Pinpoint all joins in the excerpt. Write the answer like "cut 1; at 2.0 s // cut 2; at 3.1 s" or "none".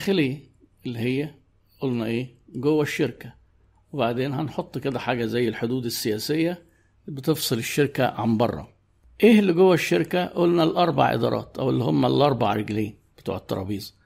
none

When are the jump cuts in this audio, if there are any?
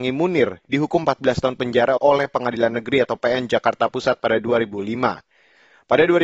cut 1; at 2.0 s

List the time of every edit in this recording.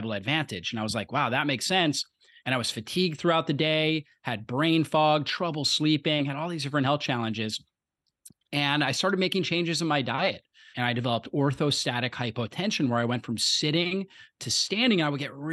cut 1; at 2.4 s // cut 2; at 10.7 s

